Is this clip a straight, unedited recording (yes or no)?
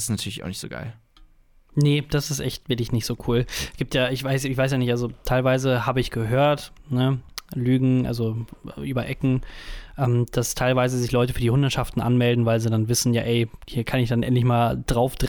yes